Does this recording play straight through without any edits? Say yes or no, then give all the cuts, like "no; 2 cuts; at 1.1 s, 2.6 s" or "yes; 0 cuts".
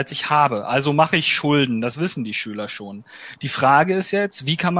yes; 0 cuts